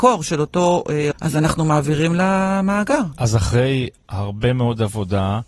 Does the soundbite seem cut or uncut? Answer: cut